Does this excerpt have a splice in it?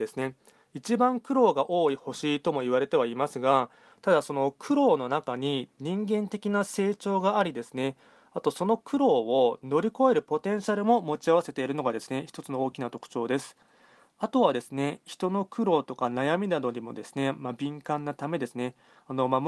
no; 0 cuts

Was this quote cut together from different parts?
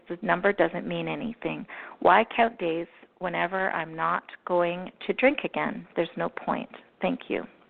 no; 0 cuts

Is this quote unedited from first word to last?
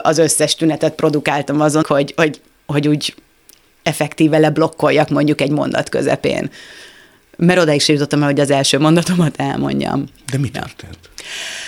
no; 1 cut; at 1.8 s

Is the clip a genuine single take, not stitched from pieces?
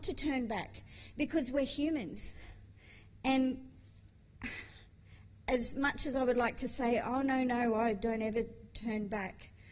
yes; 0 cuts

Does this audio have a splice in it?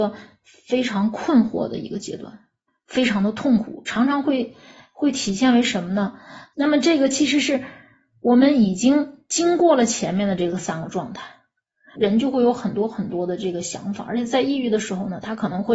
yes; 2 cuts; at 6.5 s, 12.0 s

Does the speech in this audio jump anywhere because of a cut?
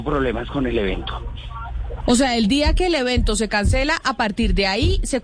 no; 0 cuts

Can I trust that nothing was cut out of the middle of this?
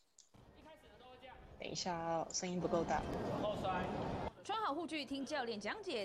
yes; 0 cuts

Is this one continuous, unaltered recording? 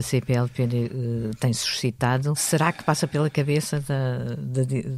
no; 1 cut; at 2.3 s

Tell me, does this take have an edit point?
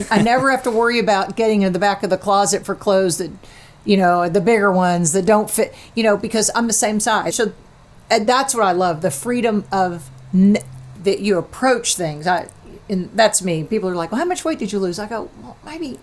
yes; 2 cuts; at 7.3 s, 11.0 s

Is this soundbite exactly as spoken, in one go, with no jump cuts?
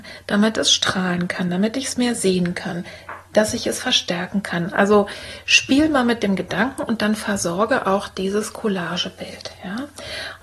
yes; 0 cuts

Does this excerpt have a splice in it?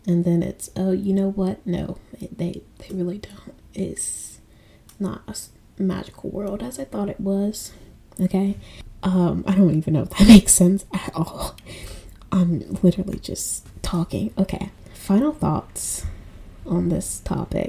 no; 0 cuts

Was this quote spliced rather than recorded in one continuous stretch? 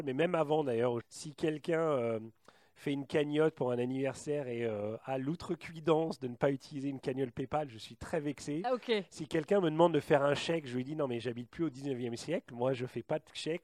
yes; 1 cut; at 1.0 s

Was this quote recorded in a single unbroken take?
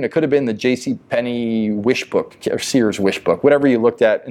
yes; 0 cuts

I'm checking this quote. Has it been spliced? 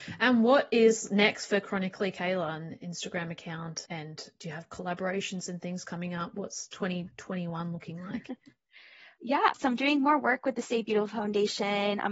no; 0 cuts

